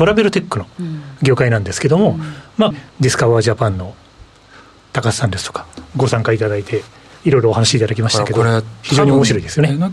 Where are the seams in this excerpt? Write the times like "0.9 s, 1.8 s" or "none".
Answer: 2.7 s